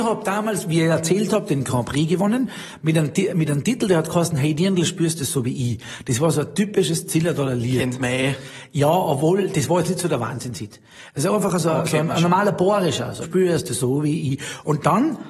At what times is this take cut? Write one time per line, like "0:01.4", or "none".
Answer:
0:13.2